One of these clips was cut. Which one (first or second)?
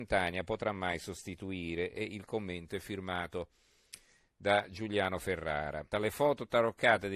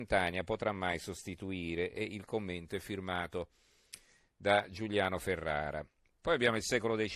first